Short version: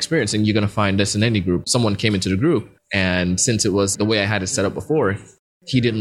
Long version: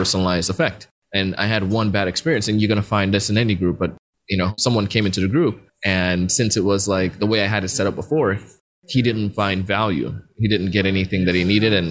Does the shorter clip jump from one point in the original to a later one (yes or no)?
yes